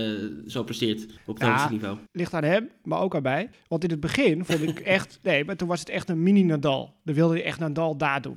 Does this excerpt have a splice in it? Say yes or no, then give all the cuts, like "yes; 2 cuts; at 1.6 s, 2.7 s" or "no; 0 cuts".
yes; 1 cut; at 2.1 s